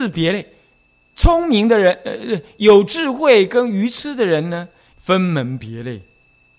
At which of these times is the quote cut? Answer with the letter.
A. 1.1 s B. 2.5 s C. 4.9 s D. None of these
C